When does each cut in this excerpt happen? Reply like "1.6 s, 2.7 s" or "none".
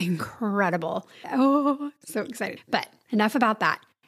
1.2 s, 2.6 s